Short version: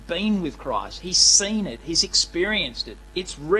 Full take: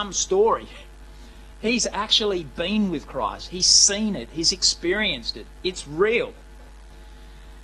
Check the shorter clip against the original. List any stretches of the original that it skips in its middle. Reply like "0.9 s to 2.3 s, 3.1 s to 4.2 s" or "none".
none